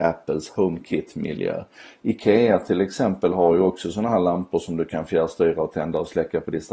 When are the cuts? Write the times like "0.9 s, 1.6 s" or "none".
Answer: none